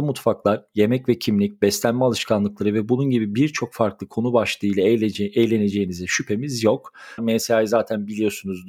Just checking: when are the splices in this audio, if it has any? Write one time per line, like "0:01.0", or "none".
0:07.2